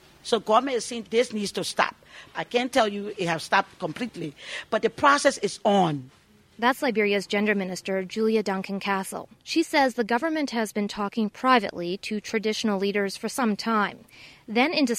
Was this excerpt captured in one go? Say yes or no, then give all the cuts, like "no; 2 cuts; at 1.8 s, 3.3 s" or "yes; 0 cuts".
yes; 0 cuts